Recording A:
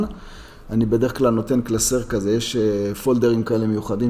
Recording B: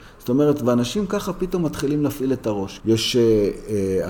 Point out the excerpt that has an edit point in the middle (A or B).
B